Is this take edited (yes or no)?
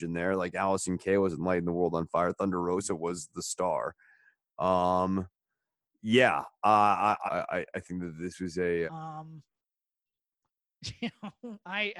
yes